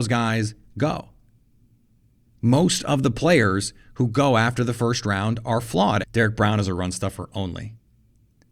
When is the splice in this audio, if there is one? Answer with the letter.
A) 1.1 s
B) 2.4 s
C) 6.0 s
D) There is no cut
C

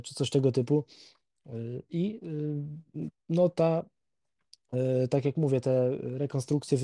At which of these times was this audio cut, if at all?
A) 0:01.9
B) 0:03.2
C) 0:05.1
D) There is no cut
B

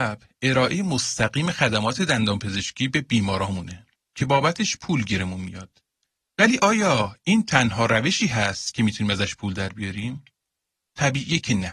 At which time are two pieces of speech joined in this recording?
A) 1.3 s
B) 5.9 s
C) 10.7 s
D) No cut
D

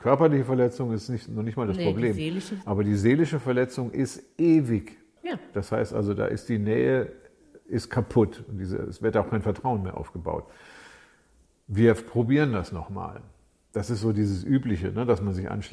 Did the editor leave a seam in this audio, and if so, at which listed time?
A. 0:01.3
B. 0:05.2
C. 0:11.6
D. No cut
B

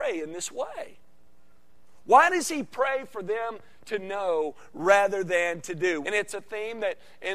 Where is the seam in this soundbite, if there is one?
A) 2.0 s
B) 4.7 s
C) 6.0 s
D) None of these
C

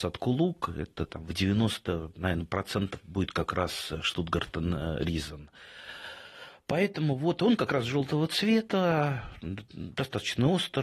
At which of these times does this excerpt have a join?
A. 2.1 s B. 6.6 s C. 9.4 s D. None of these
D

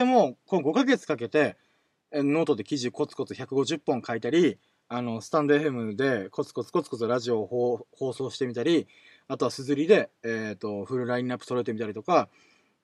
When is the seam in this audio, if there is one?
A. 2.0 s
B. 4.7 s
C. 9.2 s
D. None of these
D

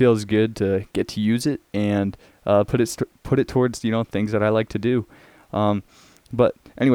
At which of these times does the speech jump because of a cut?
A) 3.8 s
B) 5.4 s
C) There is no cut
C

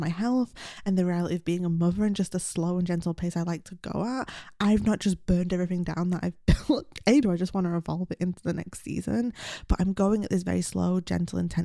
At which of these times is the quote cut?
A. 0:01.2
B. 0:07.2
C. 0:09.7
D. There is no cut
B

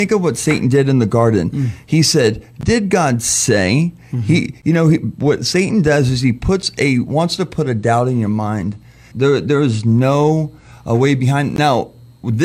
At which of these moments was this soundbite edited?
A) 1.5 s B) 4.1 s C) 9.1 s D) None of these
C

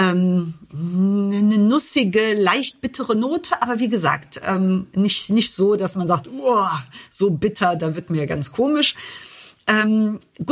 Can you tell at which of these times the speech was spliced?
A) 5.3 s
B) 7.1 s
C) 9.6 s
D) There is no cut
D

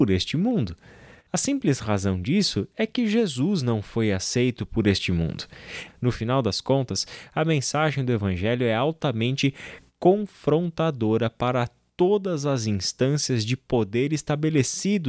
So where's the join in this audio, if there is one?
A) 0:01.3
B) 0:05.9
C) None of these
B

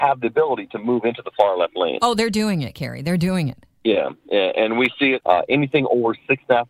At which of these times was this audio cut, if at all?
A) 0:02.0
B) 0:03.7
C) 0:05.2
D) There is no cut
C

